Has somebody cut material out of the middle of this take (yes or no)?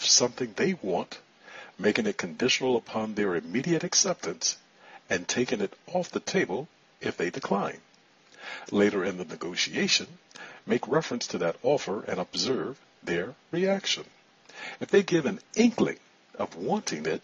no